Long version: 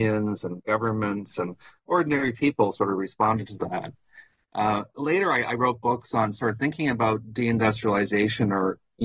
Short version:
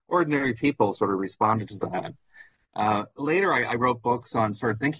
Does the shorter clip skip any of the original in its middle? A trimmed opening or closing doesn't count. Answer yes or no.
no